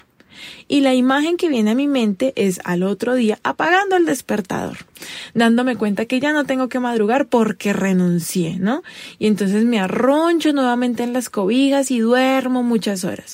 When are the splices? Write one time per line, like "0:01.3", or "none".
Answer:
none